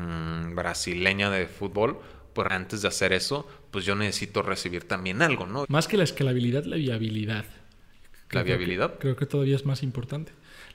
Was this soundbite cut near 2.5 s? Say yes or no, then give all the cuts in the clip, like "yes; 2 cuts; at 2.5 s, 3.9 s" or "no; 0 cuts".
yes; 2 cuts; at 2.5 s, 5.6 s